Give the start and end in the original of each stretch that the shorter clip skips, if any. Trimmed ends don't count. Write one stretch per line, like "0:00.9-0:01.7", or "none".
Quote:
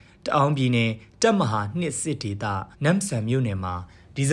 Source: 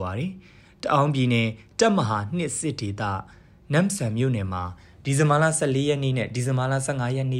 0:03.3-0:03.6